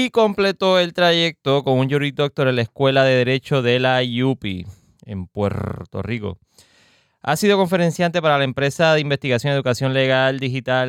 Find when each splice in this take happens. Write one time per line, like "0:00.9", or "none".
none